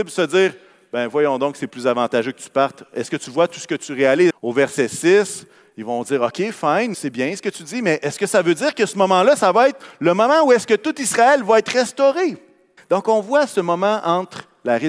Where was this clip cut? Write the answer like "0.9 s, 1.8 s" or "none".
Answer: 4.3 s, 6.9 s, 12.8 s